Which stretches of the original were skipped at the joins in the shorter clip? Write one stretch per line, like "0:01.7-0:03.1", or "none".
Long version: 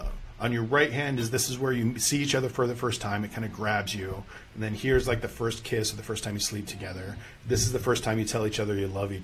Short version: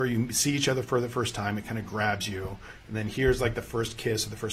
none